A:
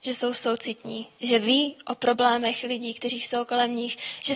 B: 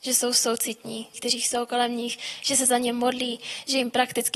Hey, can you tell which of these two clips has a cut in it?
B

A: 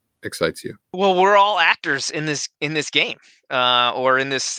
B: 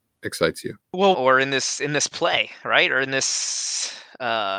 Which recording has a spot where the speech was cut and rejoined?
B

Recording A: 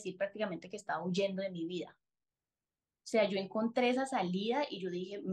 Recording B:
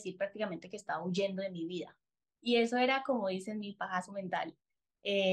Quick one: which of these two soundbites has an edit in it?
B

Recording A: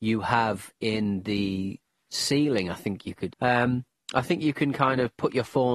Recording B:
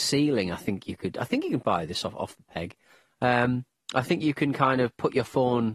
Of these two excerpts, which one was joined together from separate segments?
A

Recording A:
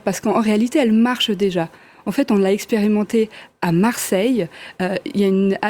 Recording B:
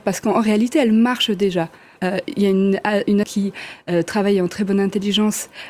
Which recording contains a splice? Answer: B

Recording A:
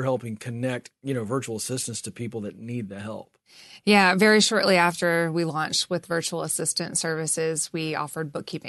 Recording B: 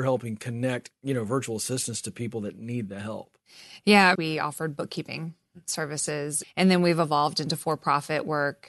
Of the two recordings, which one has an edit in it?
B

